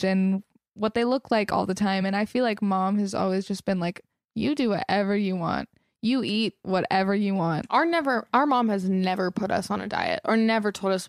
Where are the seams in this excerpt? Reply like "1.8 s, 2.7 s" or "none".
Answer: none